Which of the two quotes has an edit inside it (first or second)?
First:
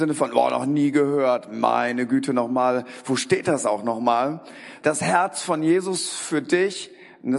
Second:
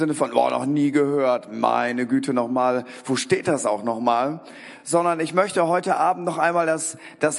first